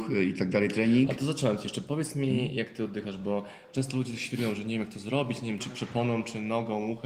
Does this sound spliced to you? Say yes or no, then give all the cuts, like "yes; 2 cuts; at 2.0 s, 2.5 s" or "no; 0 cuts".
yes; 1 cut; at 5.6 s